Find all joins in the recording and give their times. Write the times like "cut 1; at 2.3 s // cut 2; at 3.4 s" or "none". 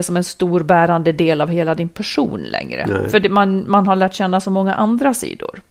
none